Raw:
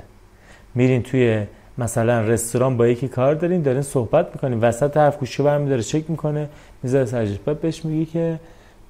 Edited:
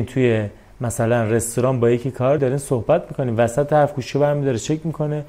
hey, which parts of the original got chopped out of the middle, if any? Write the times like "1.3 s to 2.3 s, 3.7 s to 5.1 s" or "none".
3.4 s to 3.6 s